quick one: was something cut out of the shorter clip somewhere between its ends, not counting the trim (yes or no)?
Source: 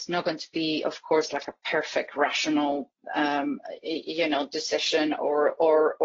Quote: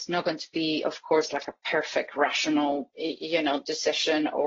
yes